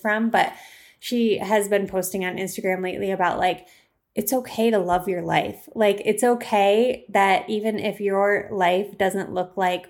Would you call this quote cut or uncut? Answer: uncut